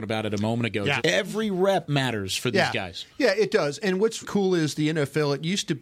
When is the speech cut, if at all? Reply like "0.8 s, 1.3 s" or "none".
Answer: 1.0 s, 4.2 s